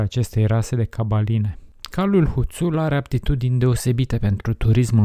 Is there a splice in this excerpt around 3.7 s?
no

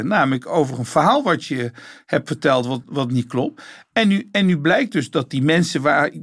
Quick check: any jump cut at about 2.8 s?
yes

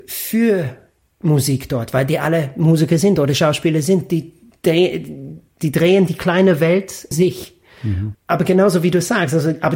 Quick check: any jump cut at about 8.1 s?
yes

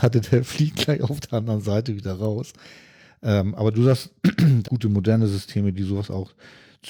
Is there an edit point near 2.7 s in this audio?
no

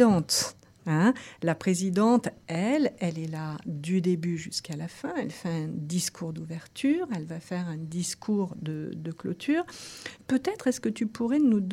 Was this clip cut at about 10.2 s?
no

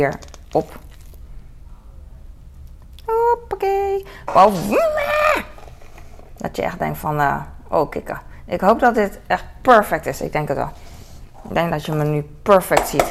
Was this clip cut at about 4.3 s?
yes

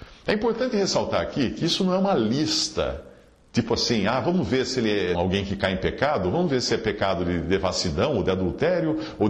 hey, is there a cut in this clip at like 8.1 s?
no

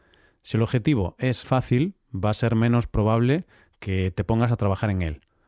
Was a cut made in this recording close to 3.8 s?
no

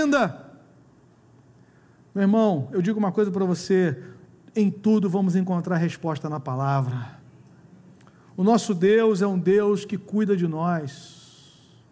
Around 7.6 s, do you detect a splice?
no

